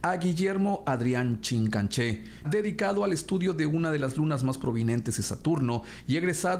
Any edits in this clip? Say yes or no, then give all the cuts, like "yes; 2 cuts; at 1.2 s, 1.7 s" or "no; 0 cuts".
yes; 1 cut; at 2.4 s